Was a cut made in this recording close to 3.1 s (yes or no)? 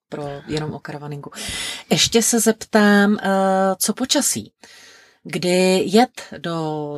no